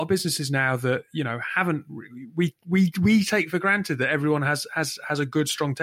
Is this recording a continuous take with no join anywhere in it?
yes; 0 cuts

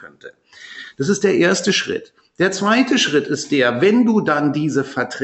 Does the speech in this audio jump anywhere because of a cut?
no; 0 cuts

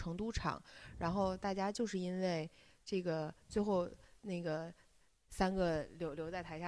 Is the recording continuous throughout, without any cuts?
yes; 0 cuts

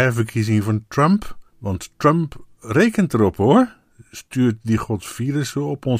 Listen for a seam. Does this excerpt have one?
yes; 1 cut; at 1.5 s

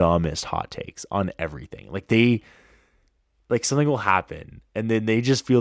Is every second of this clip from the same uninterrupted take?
yes; 0 cuts

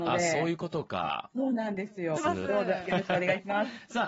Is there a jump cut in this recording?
yes; 1 cut; at 2.2 s

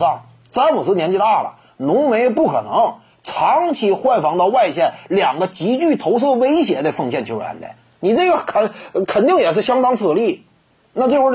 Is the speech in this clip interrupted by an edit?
no; 0 cuts

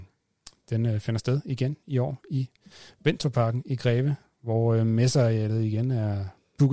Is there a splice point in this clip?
no; 0 cuts

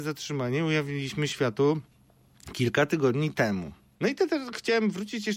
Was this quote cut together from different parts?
yes; 1 cut; at 4.0 s

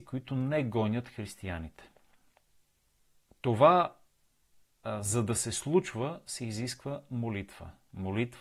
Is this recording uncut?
yes; 0 cuts

